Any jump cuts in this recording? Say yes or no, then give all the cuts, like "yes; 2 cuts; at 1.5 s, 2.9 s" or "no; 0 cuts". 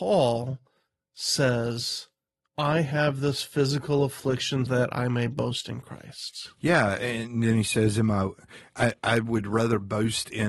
yes; 1 cut; at 4.7 s